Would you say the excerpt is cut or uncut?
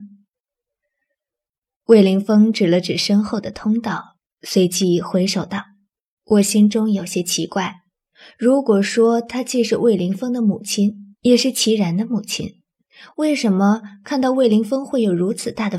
cut